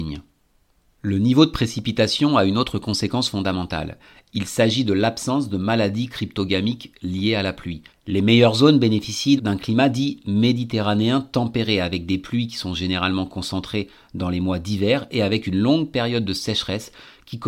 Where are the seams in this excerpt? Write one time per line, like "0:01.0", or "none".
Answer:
0:07.9
0:09.4

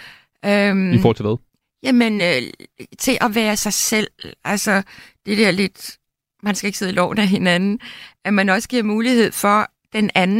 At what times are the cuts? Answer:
none

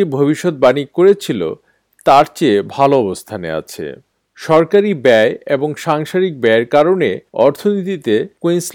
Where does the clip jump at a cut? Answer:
none

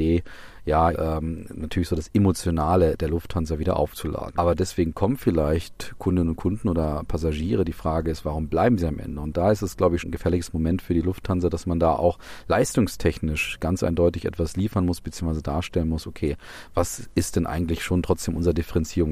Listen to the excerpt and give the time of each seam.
0:00.9
0:04.3
0:10.0

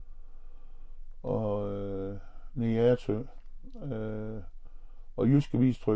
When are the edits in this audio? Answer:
none

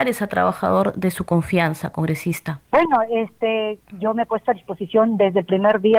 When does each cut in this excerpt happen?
0:02.7
0:03.8

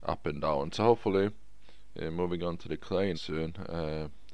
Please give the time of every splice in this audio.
0:03.1

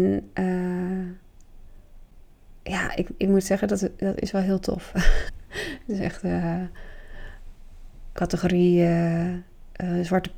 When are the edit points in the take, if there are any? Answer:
0:05.3
0:08.2

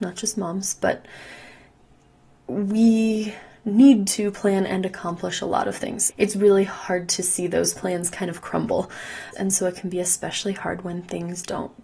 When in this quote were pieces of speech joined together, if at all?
0:06.1
0:09.3

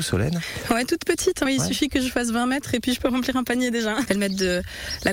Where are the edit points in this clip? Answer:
0:01.5
0:04.1

